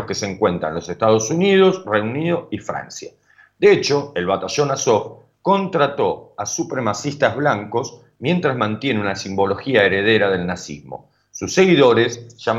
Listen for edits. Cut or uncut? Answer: uncut